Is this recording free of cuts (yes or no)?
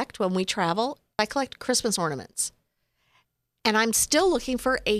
yes